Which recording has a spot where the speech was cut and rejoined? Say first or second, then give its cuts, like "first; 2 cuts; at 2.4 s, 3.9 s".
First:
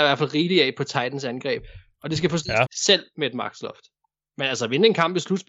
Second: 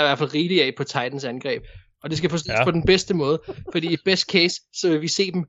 first; 1 cut; at 2.6 s